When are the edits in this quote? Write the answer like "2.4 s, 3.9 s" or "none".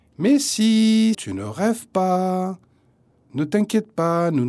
1.1 s

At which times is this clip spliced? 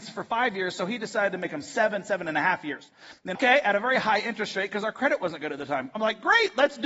3.4 s

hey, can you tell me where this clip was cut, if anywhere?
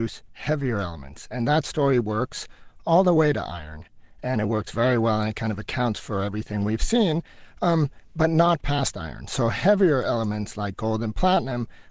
none

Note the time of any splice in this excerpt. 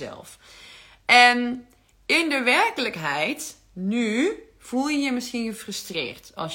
none

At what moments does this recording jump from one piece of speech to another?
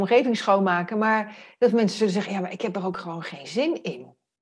2.3 s

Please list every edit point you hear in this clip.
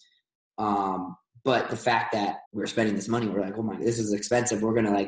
2.4 s

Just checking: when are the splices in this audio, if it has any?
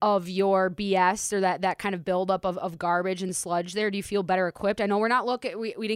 none

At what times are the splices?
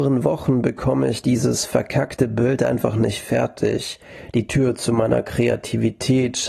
none

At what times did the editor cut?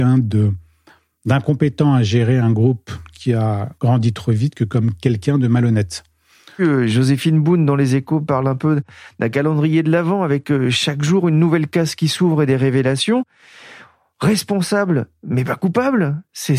6.6 s

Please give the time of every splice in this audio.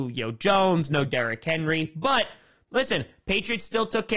none

